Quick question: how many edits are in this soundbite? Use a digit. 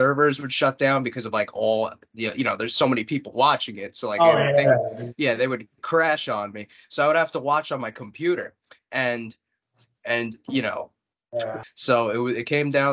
2